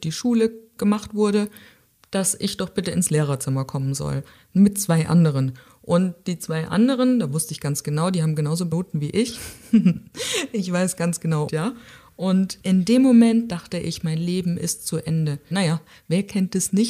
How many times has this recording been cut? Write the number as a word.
two